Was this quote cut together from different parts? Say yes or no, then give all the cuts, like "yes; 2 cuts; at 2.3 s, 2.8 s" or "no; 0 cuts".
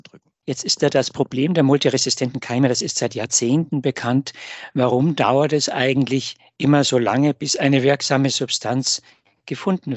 no; 0 cuts